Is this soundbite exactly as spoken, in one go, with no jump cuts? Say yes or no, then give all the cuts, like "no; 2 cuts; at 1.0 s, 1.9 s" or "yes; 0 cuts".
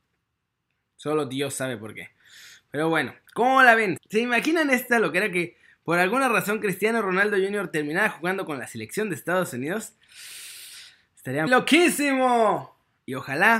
no; 2 cuts; at 4.0 s, 11.5 s